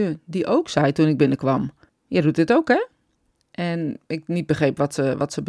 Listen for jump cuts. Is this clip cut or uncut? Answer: cut